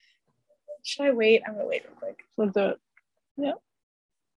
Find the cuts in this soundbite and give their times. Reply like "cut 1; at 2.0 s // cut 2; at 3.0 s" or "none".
cut 1; at 2.4 s